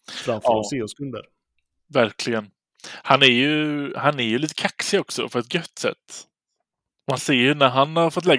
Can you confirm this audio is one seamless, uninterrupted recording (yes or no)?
yes